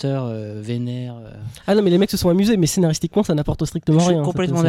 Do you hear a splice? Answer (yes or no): no